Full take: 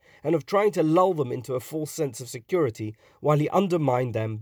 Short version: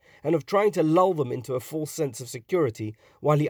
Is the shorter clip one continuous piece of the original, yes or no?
yes